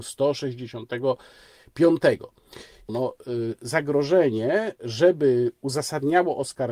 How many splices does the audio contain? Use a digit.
1